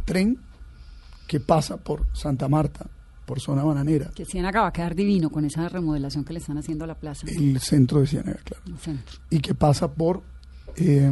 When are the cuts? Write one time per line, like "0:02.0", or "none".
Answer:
0:03.3

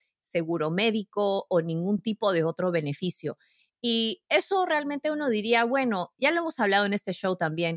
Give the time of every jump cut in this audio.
none

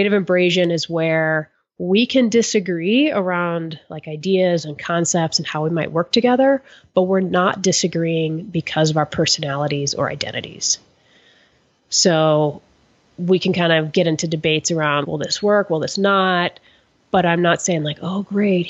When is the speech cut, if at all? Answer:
0:15.0

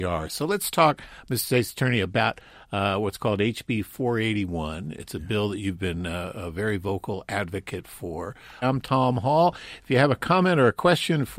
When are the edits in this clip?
0:08.6

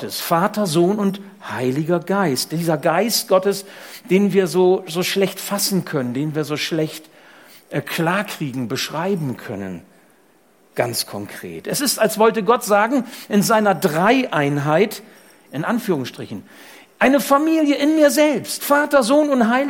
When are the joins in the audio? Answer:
0:15.5

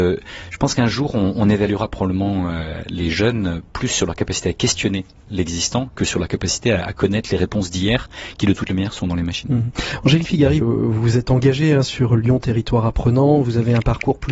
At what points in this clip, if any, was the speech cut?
0:10.6

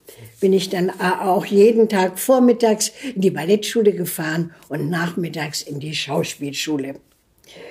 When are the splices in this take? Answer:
none

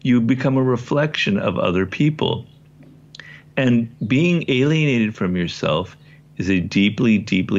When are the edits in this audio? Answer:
none

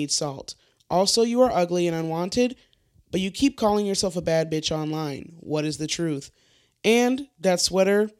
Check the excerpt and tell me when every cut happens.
none

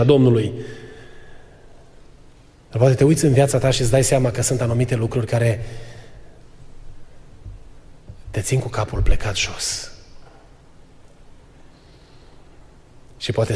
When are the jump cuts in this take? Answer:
none

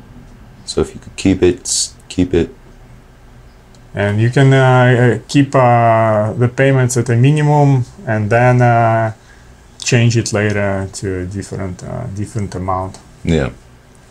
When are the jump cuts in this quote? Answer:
none

